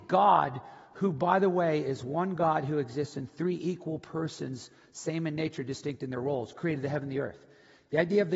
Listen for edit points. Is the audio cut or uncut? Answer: uncut